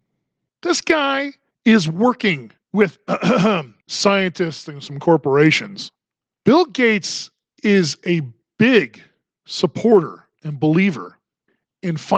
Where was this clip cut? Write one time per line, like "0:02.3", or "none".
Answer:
0:06.3